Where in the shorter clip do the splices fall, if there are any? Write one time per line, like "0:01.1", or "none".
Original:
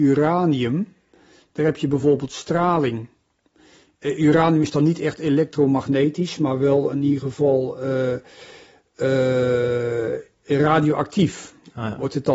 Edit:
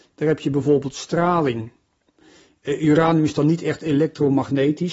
none